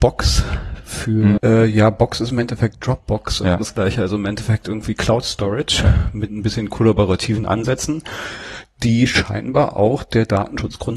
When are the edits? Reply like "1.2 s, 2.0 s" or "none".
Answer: 1.4 s